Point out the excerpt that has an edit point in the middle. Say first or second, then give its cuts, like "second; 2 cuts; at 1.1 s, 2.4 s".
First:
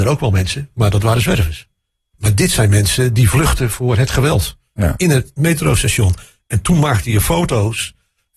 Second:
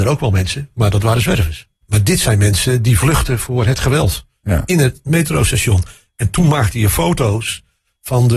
second; 1 cut; at 1.8 s